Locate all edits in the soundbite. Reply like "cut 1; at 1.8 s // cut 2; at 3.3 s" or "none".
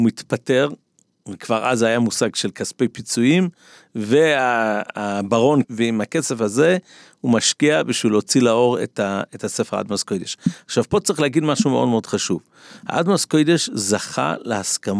cut 1; at 5.6 s